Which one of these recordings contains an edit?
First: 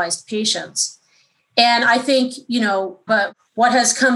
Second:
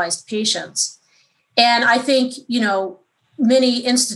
first; 1 cut; at 3.1 s

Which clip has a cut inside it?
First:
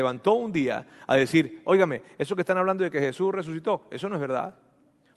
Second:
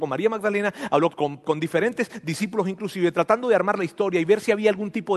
second; 1 cut; at 1.1 s

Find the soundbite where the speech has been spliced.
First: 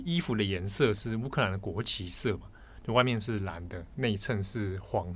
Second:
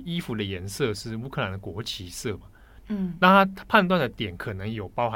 second; 1 cut; at 2.8 s

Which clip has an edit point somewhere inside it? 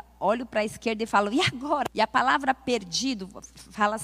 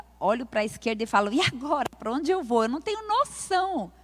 first; 1 cut; at 1.9 s

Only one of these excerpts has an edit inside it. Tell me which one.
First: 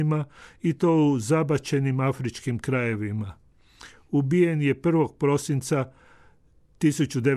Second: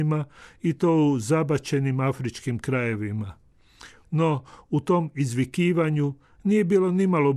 second; 1 cut; at 4.0 s

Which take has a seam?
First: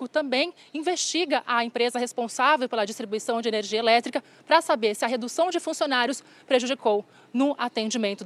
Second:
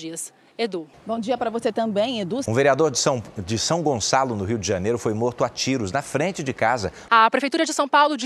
second; 3 cuts; at 0.9 s, 2.4 s, 7.1 s

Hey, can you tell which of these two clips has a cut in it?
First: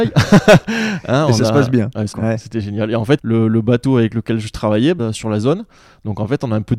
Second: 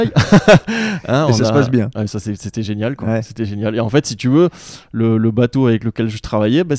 first; 3 cuts; at 2.1 s, 3.2 s, 5.0 s

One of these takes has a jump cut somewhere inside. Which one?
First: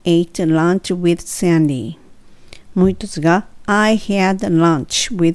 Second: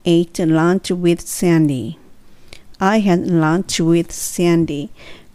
second; 1 cut; at 2.7 s

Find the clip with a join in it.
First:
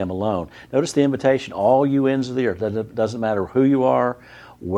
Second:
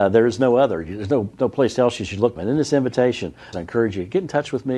second; 2 cuts; at 2.4 s, 3.5 s

